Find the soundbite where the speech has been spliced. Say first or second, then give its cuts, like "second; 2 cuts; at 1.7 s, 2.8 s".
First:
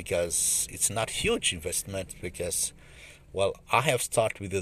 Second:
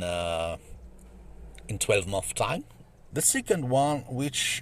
second; 1 cut; at 3.1 s